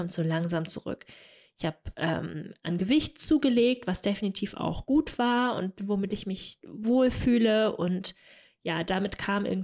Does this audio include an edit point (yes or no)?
no